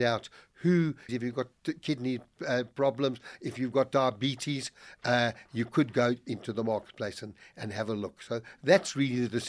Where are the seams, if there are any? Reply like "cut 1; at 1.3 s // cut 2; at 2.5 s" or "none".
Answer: cut 1; at 1.1 s

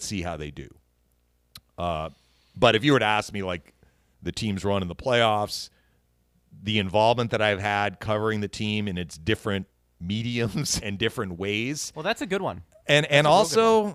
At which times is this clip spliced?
cut 1; at 4.1 s // cut 2; at 10.8 s

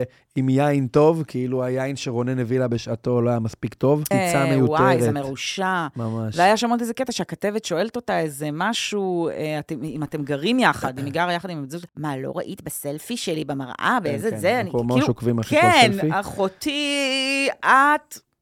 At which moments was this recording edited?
cut 1; at 4.1 s // cut 2; at 11.9 s

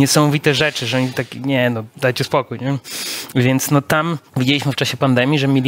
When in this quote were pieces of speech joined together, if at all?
cut 1; at 4.3 s

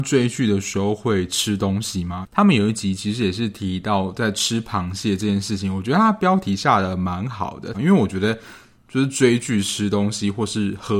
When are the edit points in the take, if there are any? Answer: cut 1; at 2.2 s // cut 2; at 7.7 s

